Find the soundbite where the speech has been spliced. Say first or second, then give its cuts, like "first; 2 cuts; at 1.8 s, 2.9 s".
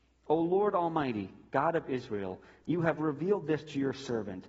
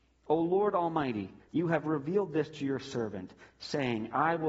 second; 1 cut; at 1.4 s